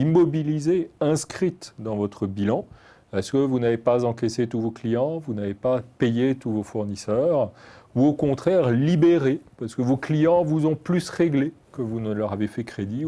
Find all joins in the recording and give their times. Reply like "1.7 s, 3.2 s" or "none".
none